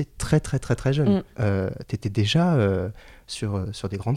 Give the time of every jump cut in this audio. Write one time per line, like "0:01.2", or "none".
0:01.3